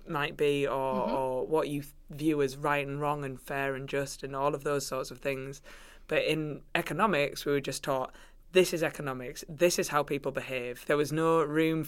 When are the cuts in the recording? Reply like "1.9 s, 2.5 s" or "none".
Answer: 10.9 s